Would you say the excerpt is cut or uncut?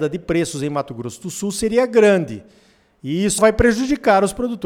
cut